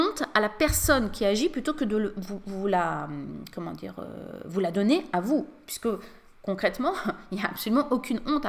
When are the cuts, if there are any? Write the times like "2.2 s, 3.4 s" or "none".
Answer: none